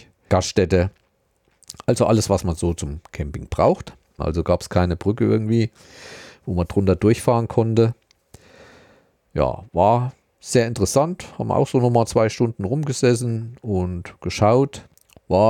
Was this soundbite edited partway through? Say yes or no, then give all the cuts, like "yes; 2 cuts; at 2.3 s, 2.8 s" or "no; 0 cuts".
yes; 1 cut; at 4.2 s